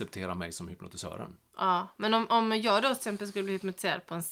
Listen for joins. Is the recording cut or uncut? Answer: uncut